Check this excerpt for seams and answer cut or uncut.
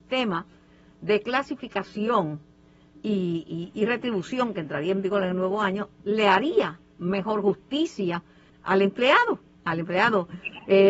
cut